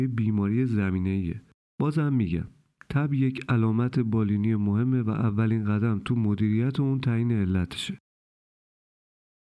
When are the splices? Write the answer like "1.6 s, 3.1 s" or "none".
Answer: 1.7 s